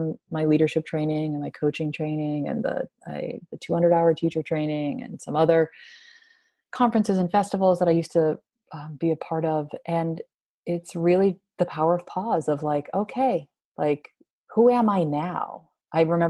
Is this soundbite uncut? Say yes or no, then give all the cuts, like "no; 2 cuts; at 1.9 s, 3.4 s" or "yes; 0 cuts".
yes; 0 cuts